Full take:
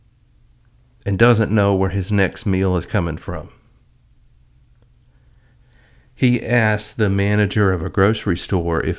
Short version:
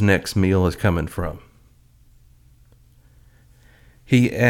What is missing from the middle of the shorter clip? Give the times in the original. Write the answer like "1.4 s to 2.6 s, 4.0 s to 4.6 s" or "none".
none